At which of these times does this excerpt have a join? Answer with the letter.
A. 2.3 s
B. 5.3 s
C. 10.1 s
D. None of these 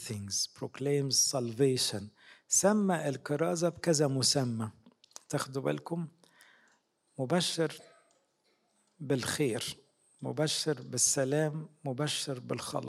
D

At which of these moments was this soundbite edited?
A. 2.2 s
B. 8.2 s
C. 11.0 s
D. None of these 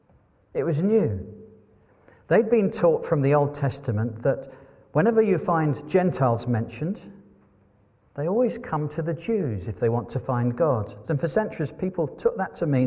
C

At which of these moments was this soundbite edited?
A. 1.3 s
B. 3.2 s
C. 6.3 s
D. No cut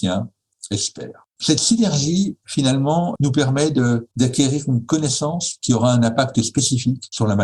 B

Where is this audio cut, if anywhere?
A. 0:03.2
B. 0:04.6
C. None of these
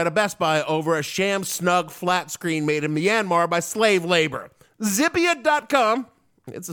B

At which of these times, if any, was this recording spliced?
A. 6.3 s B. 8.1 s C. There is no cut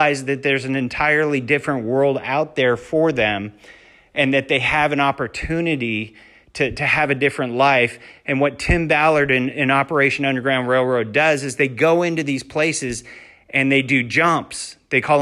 C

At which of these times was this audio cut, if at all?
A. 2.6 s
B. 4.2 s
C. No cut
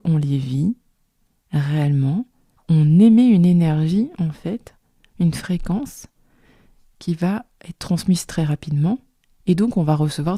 A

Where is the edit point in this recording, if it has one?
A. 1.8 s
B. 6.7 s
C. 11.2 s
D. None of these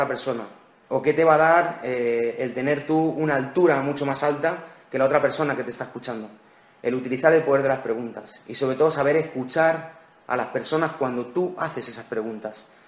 D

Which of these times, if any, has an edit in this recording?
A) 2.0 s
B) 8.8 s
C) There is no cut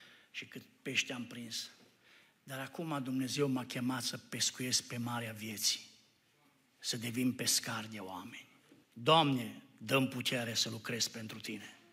B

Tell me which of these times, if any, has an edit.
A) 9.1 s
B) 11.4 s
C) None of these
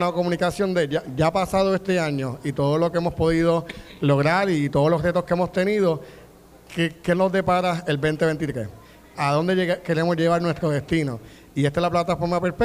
A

